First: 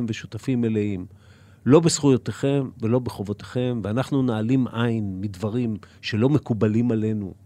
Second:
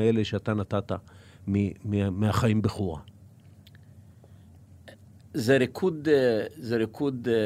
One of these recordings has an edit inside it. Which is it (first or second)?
second